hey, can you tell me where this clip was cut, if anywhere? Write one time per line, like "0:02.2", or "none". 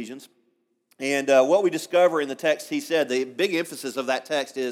none